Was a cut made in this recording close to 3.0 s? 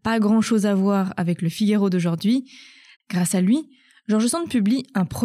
yes; 1 cut; at 3.0 s

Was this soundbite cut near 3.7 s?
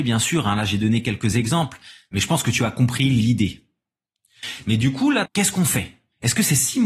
no; 1 cut; at 5.3 s

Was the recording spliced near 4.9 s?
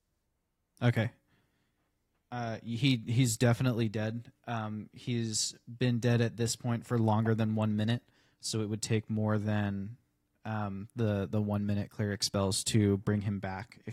no; 0 cuts

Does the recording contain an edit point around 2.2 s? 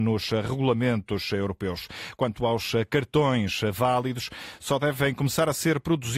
no; 0 cuts

